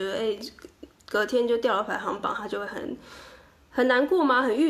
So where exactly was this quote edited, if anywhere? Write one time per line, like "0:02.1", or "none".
none